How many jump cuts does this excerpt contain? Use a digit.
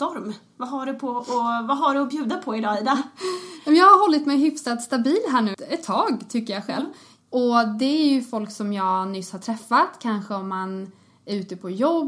2